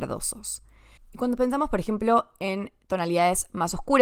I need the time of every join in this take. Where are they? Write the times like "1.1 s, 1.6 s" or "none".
none